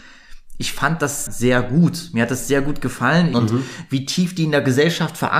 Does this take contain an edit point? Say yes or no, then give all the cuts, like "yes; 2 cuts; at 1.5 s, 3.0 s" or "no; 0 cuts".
yes; 2 cuts; at 1.3 s, 3.3 s